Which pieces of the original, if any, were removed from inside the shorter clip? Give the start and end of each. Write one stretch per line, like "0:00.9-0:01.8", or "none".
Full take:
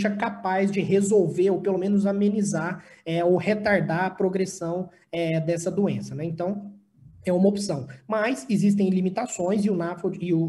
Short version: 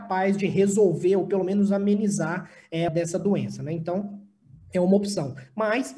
0:03.2-0:05.4